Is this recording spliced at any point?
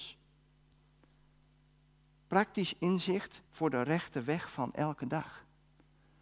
yes; 1 cut; at 3.5 s

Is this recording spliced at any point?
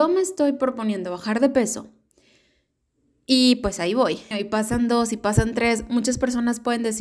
yes; 1 cut; at 4.3 s

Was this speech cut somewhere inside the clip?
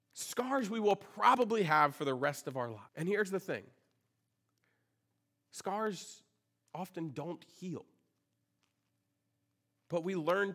yes; 1 cut; at 2.9 s

